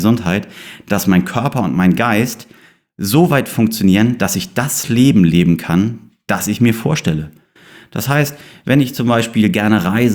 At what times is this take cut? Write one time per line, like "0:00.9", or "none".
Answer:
none